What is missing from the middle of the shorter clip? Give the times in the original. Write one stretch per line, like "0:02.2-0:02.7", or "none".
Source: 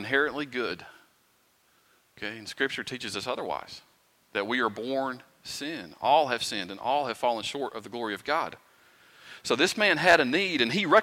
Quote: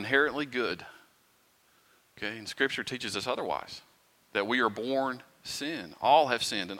none